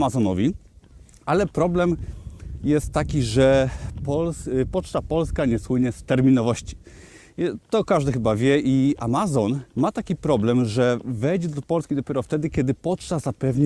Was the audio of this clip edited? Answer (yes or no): yes